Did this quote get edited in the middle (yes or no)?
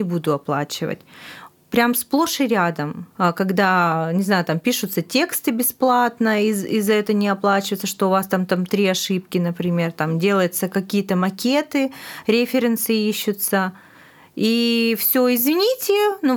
yes